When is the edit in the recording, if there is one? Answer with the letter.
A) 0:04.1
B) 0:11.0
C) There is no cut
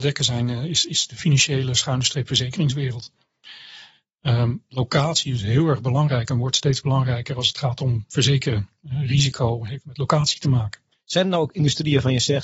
B